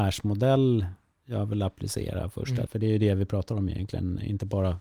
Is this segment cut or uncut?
cut